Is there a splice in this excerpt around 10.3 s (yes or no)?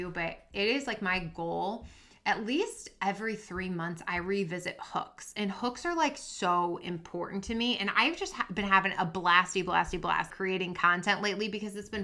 yes